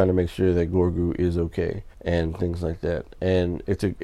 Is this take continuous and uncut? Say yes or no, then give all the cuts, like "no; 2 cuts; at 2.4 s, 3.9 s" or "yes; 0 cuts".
no; 1 cut; at 1.9 s